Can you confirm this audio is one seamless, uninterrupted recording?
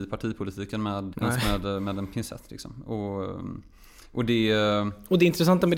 no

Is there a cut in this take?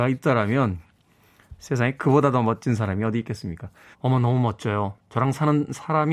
yes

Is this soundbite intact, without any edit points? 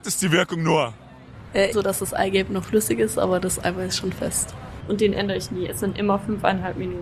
no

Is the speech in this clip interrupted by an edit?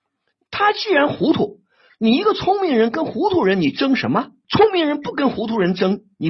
yes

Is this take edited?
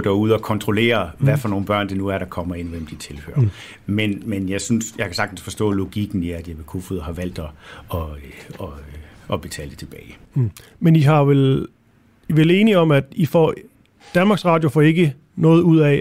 no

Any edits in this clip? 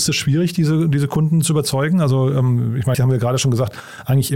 yes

